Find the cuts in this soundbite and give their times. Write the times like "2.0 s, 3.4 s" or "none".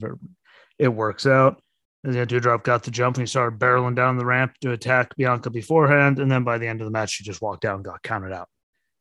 1.8 s